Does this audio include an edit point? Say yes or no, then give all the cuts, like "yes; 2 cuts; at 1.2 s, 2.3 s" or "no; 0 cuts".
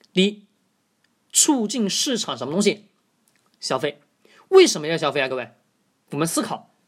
no; 0 cuts